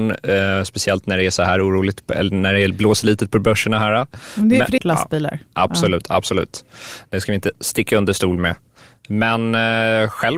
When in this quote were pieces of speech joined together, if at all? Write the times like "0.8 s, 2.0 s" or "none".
4.8 s